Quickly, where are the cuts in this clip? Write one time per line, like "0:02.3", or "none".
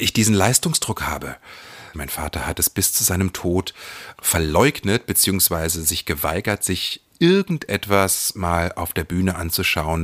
0:01.9
0:04.2